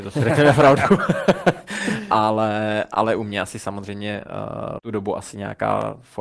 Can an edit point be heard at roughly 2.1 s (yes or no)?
no